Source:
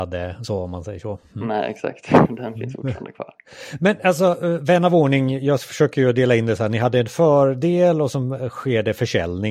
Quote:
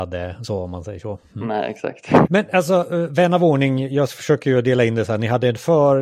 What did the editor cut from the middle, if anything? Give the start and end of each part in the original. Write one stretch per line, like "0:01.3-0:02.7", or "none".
0:02.3-0:03.8